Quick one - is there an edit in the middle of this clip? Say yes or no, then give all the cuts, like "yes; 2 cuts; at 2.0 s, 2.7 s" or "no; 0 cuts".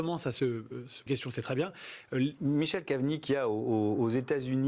yes; 2 cuts; at 1.1 s, 2.4 s